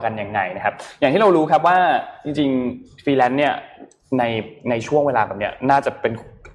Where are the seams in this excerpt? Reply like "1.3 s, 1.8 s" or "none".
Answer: none